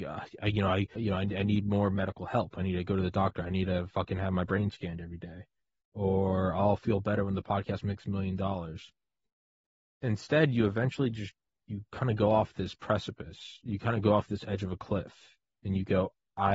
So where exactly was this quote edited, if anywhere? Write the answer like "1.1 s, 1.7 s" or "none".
1.0 s

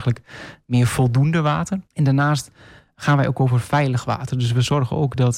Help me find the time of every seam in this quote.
1.9 s

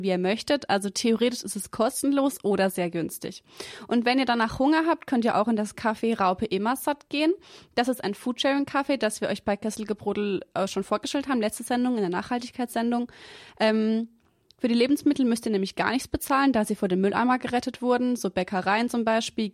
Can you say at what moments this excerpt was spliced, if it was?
none

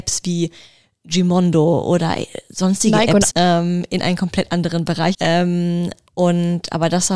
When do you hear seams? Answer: 3.3 s, 5.1 s

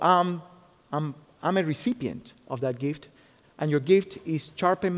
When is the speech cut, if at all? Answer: 3.4 s

